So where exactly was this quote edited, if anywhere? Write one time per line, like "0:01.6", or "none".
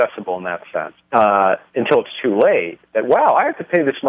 0:01.1